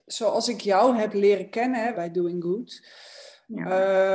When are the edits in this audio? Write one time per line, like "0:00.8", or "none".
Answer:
0:01.9